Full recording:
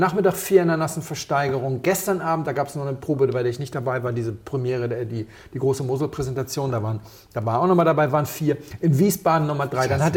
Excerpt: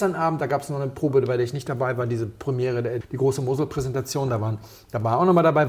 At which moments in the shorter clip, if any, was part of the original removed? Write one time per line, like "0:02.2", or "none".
0:03.0